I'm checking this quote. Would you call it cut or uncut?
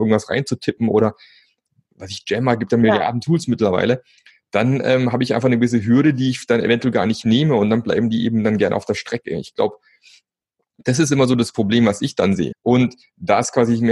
cut